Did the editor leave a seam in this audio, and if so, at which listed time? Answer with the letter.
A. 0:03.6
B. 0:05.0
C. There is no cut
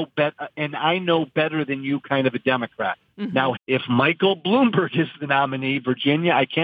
A